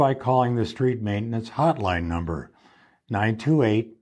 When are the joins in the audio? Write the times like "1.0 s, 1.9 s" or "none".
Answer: none